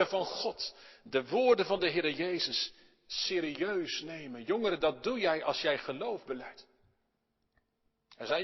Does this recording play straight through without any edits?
yes; 0 cuts

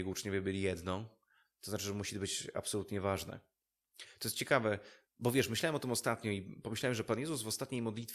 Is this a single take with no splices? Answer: yes; 0 cuts

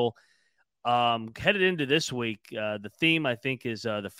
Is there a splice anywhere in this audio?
no; 0 cuts

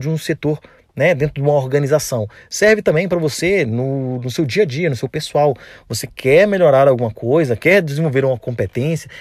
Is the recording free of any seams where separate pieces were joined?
yes; 0 cuts

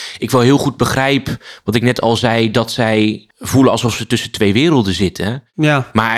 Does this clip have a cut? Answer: yes; 1 cut; at 3.3 s

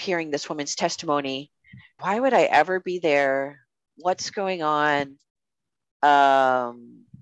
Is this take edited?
yes; 1 cut; at 2.0 s

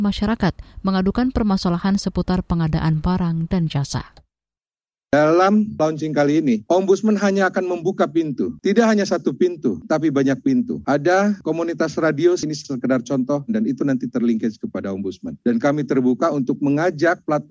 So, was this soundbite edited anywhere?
yes; 1 cut; at 13.5 s

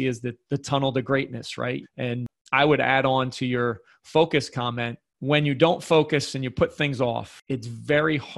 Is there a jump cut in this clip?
yes; 1 cut; at 1.8 s

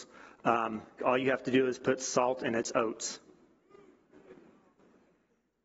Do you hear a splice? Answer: yes; 1 cut; at 1.0 s

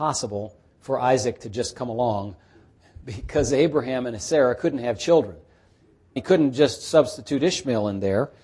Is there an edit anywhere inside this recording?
yes; 1 cut; at 6.2 s

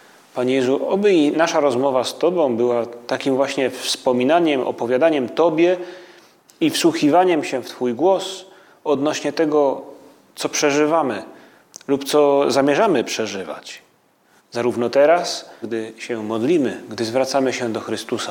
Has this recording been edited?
yes; 2 cuts; at 14.4 s, 15.6 s

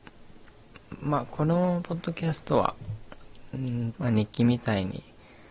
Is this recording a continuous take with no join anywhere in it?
no; 1 cut; at 3.9 s

